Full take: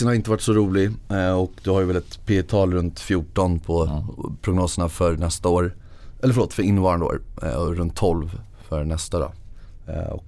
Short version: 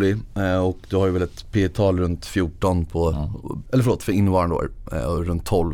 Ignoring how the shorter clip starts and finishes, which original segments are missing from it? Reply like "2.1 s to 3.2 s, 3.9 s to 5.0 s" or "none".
4.4 s to 6.2 s